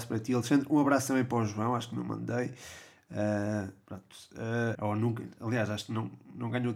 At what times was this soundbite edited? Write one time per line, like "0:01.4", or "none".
0:04.8